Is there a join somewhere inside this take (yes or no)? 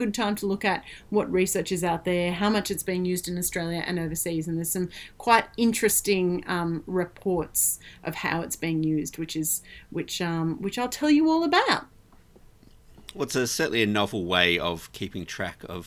no